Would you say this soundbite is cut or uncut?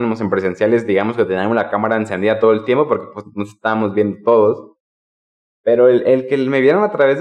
uncut